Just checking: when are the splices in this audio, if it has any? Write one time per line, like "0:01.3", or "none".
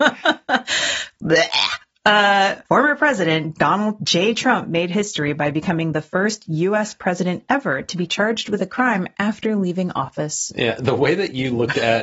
0:02.7